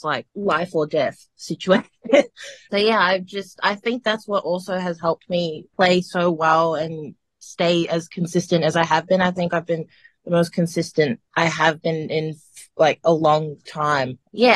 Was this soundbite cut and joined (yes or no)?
no